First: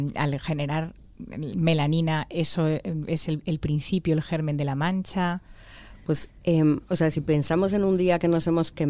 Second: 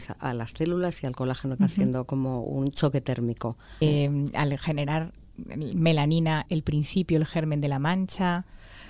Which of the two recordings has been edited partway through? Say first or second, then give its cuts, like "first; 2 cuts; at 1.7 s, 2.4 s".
second; 3 cuts; at 1.6 s, 3.8 s, 6.5 s